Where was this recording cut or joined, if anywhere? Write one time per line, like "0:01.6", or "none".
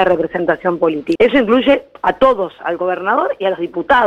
0:01.2